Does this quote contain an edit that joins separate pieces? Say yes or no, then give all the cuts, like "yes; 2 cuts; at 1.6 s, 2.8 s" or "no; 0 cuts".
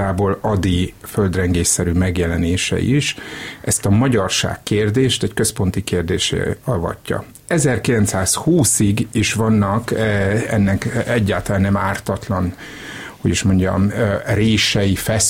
no; 0 cuts